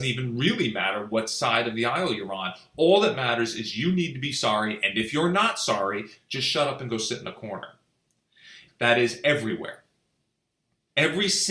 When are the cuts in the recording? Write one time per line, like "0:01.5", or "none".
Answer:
0:06.2
0:08.7